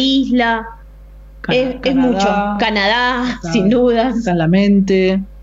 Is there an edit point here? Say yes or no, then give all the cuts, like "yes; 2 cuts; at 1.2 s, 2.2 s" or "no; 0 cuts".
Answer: no; 0 cuts